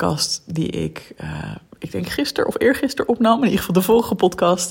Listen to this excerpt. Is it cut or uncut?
uncut